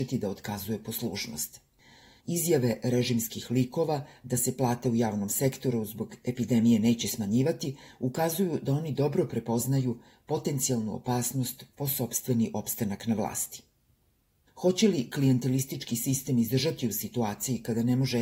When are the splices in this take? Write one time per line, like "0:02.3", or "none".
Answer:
0:02.2
0:14.5